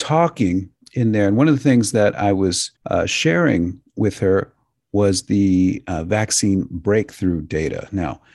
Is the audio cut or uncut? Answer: cut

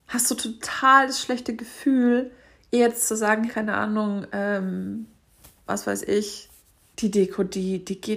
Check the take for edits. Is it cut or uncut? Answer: cut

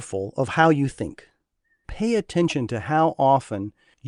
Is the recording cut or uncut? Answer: cut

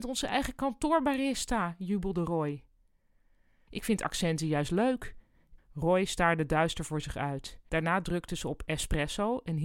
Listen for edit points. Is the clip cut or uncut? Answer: cut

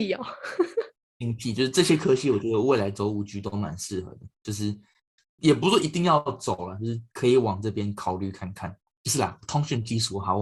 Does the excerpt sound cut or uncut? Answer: cut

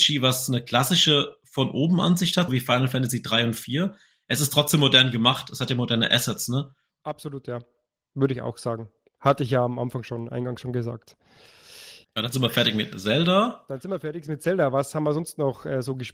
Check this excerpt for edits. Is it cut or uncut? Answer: cut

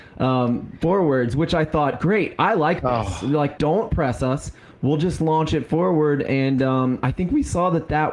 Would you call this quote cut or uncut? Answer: cut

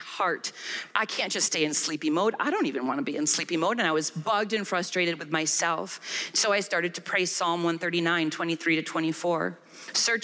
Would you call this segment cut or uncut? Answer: uncut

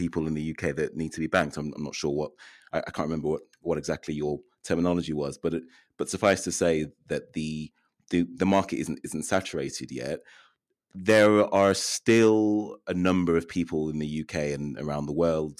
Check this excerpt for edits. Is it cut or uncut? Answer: uncut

